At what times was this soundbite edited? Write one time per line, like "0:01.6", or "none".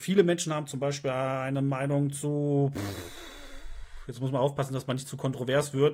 none